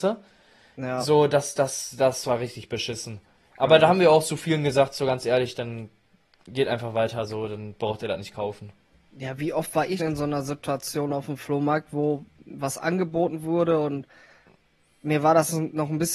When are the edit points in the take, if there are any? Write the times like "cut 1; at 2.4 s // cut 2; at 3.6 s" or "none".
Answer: cut 1; at 10.0 s